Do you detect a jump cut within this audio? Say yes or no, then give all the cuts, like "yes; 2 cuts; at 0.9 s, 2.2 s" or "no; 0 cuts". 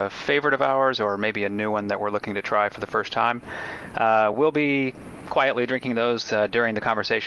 no; 0 cuts